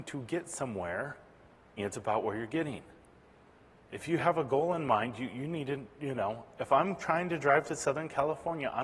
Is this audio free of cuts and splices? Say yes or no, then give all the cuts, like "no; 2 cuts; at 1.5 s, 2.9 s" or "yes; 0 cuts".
no; 1 cut; at 1.8 s